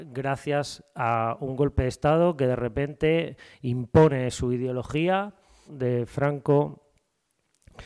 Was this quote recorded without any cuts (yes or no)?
no